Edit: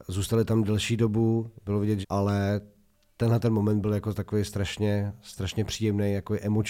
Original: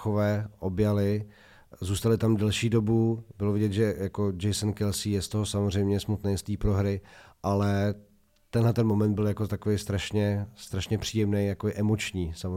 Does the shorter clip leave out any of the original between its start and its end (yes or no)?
yes